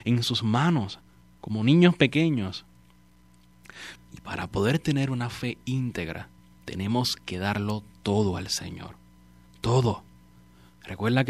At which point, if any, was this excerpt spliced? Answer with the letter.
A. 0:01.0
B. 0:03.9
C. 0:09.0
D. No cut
B